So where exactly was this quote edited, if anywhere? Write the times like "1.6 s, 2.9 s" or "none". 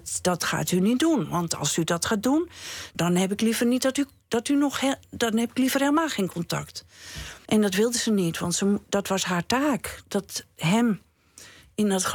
2.9 s, 7.5 s